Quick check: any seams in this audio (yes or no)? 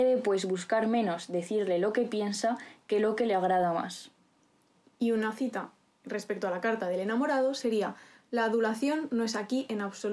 no